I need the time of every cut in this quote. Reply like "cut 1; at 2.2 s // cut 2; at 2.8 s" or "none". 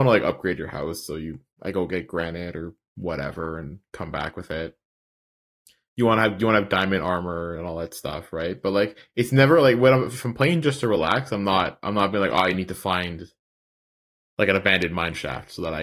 none